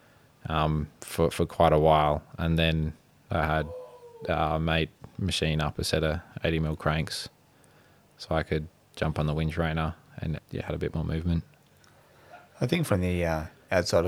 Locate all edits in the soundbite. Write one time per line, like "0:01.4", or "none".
0:00.9
0:10.4

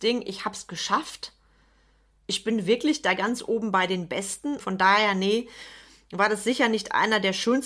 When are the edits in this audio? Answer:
0:04.6

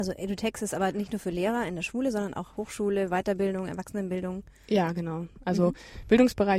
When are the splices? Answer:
none

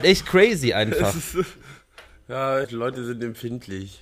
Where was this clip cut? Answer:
0:02.6

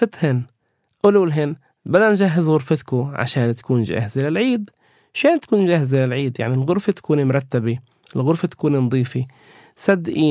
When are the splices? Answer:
none

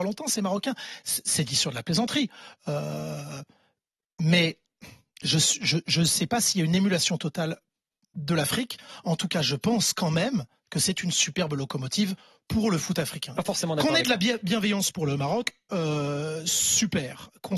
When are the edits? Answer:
0:13.4

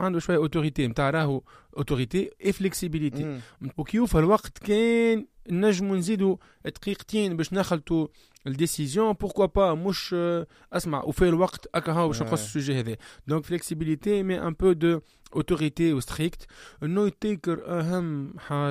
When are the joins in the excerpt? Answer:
0:03.7
0:13.4

